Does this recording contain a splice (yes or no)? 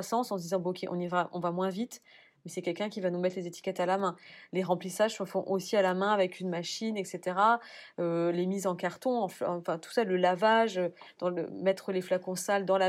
no